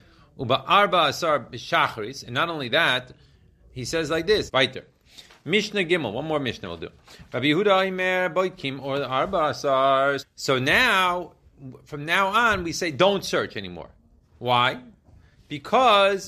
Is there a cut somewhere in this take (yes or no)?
yes